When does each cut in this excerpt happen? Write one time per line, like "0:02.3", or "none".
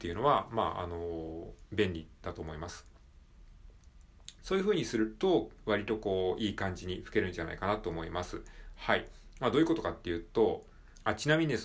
0:04.4